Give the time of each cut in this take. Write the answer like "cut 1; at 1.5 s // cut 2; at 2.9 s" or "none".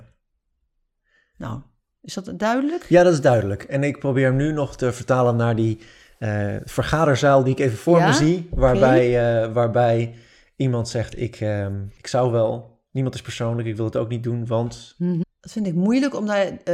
cut 1; at 15.2 s